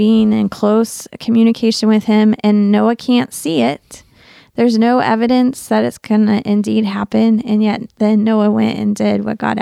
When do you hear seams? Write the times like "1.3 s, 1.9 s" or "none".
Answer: none